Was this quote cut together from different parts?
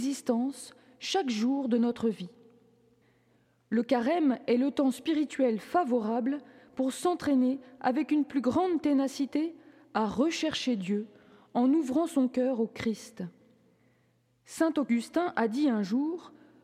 no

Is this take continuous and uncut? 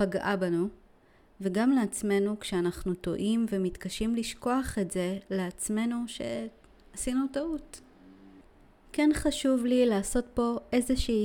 yes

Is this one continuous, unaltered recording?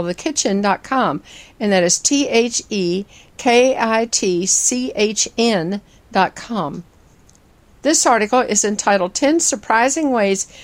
yes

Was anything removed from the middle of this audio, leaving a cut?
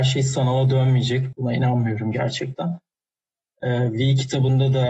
yes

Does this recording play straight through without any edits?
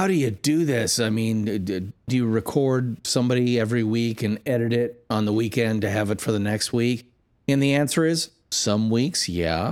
no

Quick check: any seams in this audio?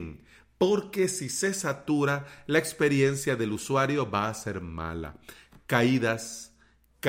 no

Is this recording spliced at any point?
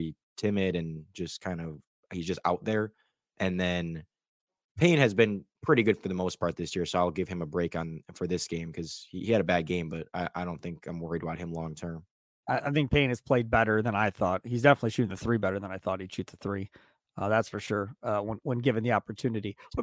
yes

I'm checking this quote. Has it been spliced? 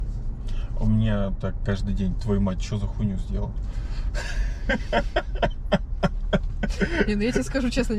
no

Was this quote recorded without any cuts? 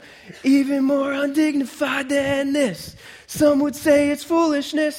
yes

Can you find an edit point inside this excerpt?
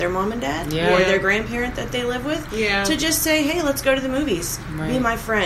no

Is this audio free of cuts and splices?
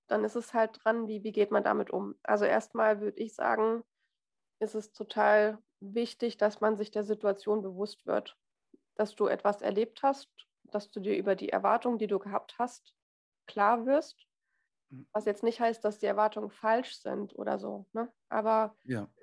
yes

